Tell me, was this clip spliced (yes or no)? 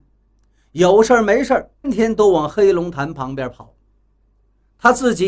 yes